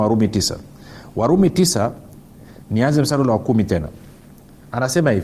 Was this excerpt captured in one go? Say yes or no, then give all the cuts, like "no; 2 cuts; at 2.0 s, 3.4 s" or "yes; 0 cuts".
yes; 0 cuts